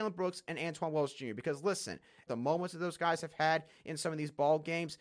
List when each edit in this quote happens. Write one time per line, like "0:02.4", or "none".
0:02.3